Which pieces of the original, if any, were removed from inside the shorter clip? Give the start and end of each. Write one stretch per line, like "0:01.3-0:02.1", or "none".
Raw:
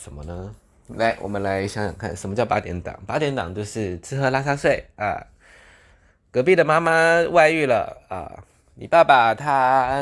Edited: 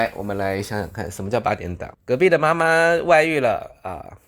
0:03.0-0:06.2

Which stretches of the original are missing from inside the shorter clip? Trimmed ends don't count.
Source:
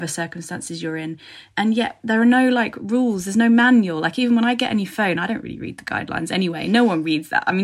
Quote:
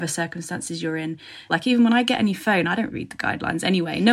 0:01.5-0:04.0
0:05.4-0:05.6

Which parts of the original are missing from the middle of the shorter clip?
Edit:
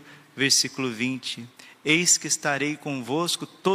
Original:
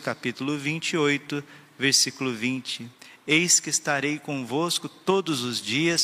none

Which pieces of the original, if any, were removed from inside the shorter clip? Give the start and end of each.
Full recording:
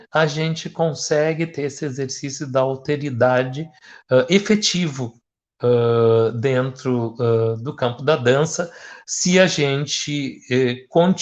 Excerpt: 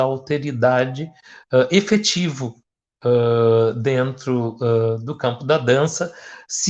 none

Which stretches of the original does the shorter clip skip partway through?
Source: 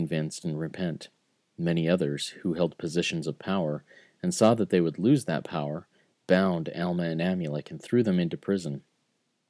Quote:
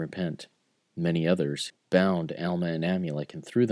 0:02.3-0:06.1

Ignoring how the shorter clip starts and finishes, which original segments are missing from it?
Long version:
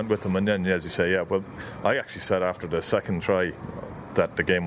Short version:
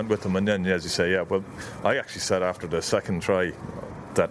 none

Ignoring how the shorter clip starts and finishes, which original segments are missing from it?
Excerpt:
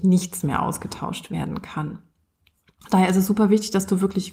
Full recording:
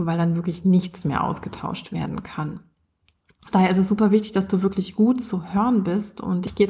none

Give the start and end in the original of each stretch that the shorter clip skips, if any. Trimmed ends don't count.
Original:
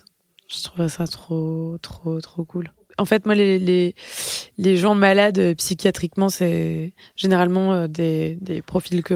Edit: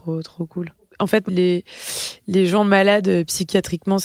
0:03.3-0:03.6

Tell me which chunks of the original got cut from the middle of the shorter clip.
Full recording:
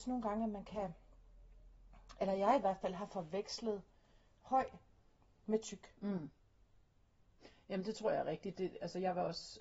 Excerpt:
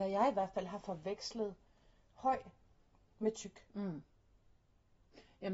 none

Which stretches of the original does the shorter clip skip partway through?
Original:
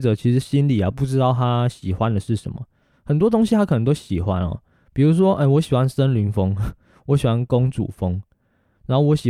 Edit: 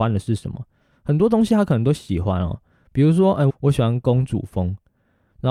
0:05.5-0:06.9

